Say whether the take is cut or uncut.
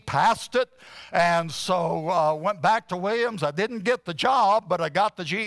uncut